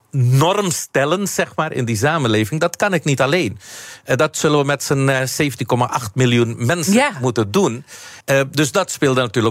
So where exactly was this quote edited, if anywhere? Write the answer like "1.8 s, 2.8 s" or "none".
8.2 s